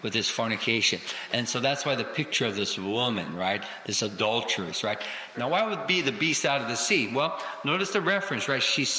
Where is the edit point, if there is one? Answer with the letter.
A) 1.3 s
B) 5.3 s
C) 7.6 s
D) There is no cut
B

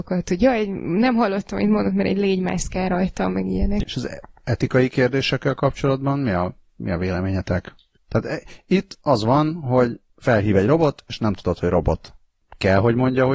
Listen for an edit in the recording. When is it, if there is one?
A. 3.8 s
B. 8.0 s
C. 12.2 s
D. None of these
A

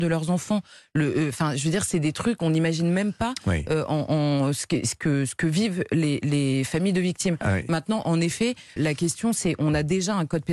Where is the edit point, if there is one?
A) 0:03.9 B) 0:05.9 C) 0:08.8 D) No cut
C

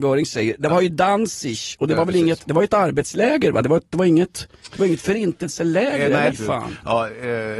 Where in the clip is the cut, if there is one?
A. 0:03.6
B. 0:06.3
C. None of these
B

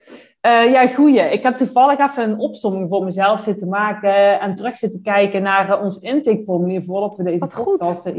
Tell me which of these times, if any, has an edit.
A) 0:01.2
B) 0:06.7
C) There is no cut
C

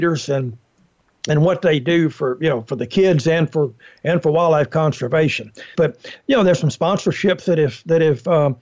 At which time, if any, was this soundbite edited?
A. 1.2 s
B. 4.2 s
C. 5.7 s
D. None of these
C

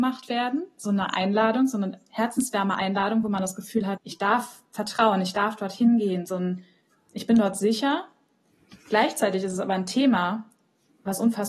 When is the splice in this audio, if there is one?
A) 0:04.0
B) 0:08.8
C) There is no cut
A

